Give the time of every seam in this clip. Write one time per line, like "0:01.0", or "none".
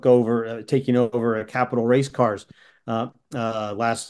none